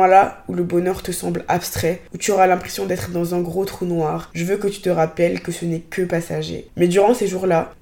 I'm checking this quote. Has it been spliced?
yes; 1 cut; at 6.7 s

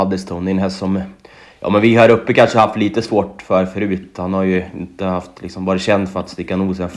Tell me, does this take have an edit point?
no; 0 cuts

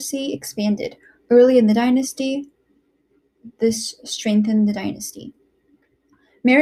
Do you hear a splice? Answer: no; 0 cuts

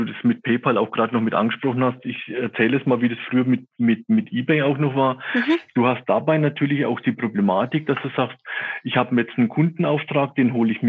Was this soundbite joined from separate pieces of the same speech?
no; 0 cuts

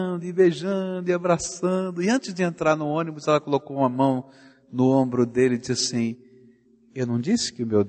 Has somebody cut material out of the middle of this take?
no; 0 cuts

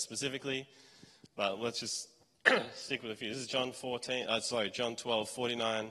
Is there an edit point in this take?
no; 0 cuts

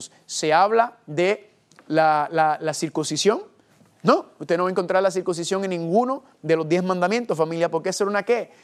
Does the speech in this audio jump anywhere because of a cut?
no; 0 cuts

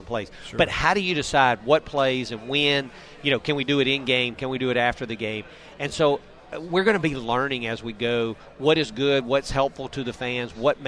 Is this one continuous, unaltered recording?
yes; 0 cuts

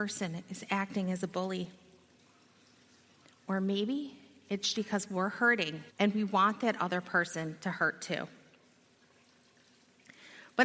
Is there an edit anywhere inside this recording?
yes; 2 cuts; at 4.7 s, 5.9 s

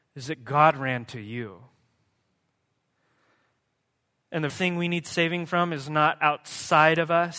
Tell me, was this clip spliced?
yes; 1 cut; at 4.5 s

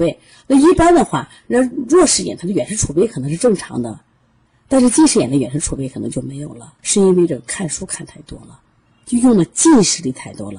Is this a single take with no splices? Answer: no; 1 cut; at 6.8 s

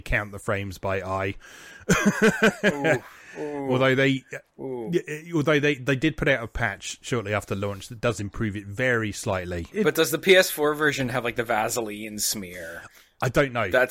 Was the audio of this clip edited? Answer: yes; 1 cut; at 9.7 s

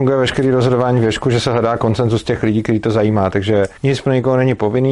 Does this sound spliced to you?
yes; 1 cut; at 3.8 s

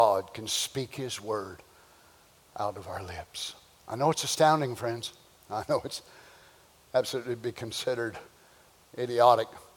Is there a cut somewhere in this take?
no; 0 cuts

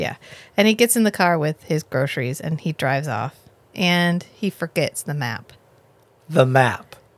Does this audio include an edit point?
no; 0 cuts

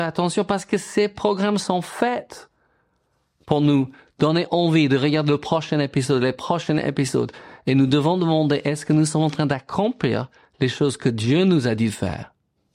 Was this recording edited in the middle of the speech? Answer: no; 0 cuts

